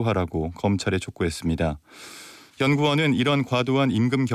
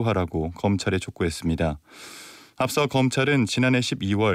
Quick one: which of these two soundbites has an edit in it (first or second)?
first